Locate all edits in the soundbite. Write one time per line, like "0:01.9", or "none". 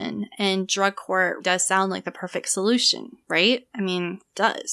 0:01.4
0:03.2